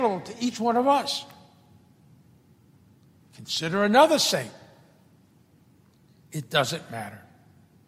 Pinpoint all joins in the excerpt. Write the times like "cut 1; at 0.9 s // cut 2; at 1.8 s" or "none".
cut 1; at 6.3 s